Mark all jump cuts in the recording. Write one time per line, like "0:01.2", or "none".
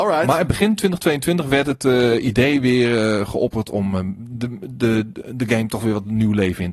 none